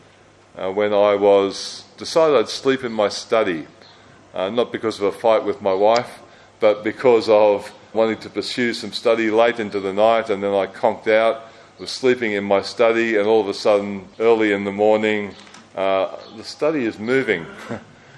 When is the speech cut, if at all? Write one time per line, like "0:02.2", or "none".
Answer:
0:07.9
0:14.1

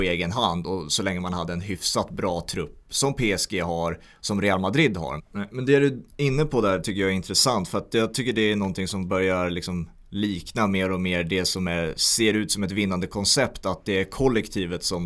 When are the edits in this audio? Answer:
0:05.2

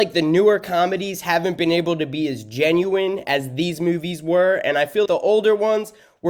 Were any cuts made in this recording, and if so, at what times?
0:05.0

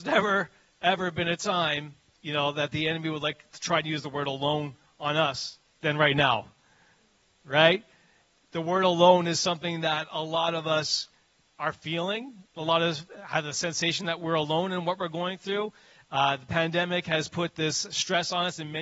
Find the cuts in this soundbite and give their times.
none

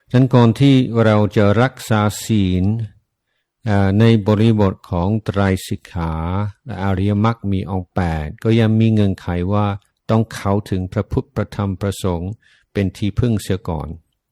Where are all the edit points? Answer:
none

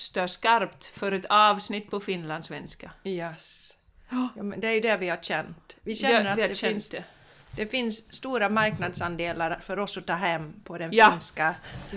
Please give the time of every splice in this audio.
none

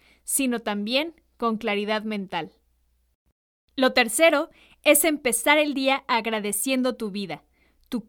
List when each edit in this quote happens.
none

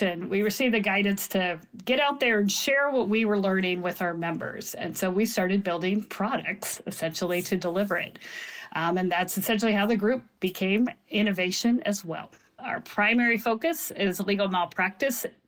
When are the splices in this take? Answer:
0:12.6

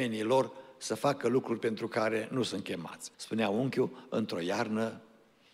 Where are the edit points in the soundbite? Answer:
0:03.1

